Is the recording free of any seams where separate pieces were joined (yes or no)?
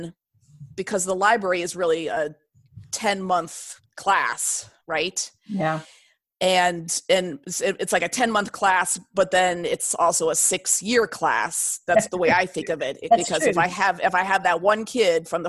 yes